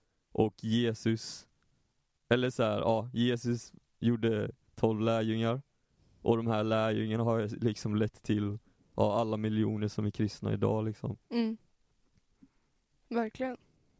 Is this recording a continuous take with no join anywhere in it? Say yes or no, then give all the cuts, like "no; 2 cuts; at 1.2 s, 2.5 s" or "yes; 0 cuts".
yes; 0 cuts